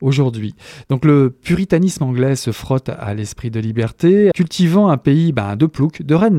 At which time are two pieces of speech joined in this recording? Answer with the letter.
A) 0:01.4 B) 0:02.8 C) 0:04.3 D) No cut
C